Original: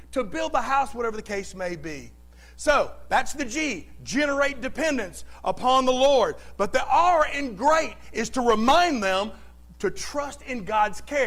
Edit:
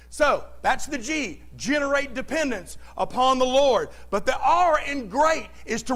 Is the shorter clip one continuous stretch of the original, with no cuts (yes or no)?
yes